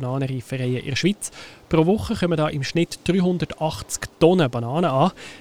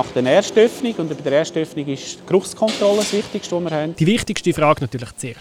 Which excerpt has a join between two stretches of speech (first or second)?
second